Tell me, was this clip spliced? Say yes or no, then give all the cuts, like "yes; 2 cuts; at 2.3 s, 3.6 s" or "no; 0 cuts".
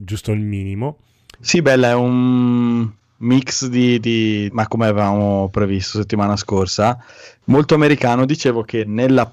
yes; 2 cuts; at 1.4 s, 4.5 s